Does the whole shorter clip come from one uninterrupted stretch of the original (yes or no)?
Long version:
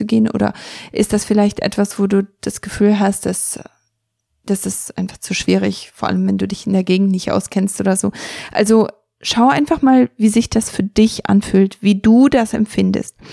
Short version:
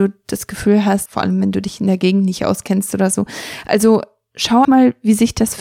no